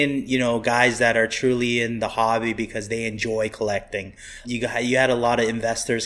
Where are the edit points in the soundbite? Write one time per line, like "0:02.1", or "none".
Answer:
0:04.4